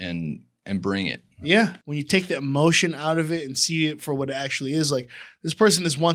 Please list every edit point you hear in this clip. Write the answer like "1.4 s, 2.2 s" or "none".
1.8 s